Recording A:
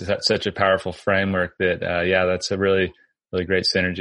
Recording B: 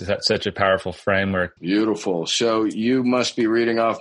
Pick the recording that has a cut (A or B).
B